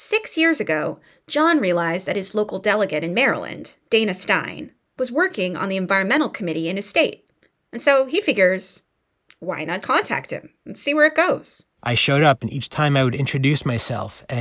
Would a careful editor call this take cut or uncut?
cut